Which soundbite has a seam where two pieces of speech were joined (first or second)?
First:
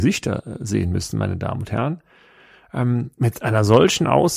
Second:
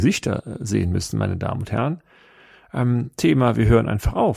second